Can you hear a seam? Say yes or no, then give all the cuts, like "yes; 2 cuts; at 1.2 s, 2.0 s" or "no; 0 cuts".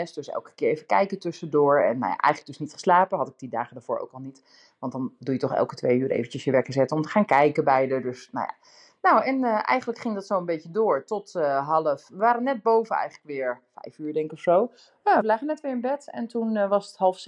yes; 1 cut; at 15.2 s